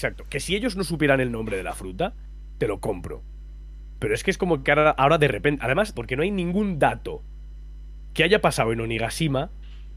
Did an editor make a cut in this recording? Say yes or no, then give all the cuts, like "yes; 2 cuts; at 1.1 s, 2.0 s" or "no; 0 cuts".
yes; 1 cut; at 5.9 s